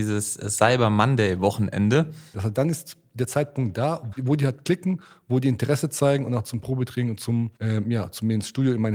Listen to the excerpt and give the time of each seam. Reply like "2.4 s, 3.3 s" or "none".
2.3 s, 4.1 s, 7.6 s